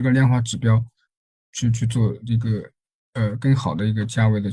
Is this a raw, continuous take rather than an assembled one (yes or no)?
yes